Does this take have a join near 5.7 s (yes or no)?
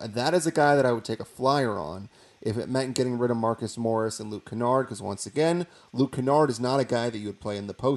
no